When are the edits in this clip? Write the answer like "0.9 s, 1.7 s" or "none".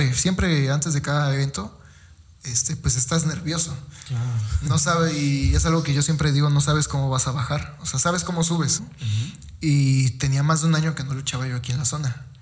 8.8 s